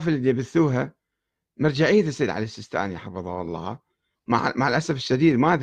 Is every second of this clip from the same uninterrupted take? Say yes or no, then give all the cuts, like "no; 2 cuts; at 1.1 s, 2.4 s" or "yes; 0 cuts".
yes; 0 cuts